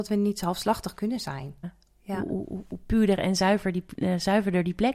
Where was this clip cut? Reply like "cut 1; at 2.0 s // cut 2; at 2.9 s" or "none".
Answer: cut 1; at 1.6 s